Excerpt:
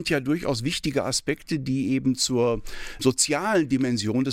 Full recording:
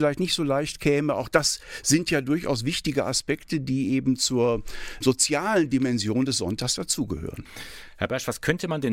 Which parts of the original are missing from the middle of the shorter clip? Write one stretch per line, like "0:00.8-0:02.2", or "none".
none